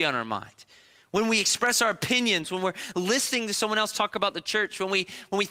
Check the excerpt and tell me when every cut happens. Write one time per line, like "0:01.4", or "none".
0:02.4